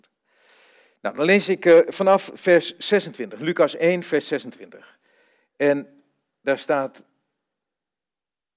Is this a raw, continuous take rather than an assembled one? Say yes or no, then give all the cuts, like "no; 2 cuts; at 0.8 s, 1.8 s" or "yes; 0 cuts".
yes; 0 cuts